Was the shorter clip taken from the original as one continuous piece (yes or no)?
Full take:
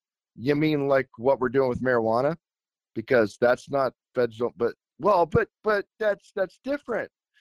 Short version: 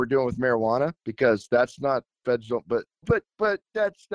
no